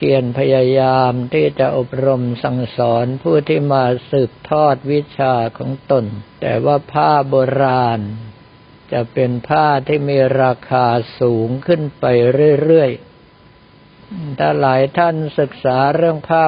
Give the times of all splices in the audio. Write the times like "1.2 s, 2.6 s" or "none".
6.3 s